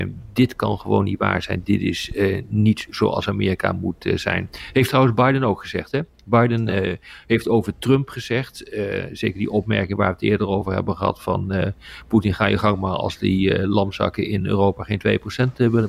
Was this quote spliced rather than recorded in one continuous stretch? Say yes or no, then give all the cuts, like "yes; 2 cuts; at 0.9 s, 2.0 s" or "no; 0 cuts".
no; 0 cuts